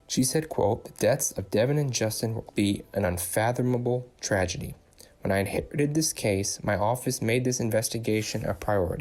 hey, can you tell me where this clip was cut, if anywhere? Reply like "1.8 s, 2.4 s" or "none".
2.5 s